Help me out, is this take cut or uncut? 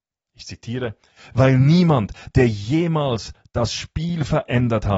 uncut